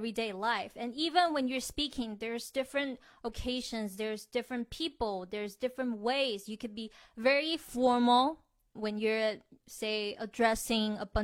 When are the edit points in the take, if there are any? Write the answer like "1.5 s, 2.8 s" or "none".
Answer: 8.8 s